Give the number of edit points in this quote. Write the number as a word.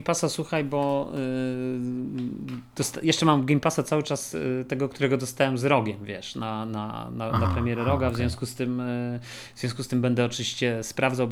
zero